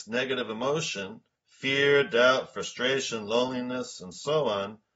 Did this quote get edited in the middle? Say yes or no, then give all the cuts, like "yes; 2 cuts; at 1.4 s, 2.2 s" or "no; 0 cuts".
no; 0 cuts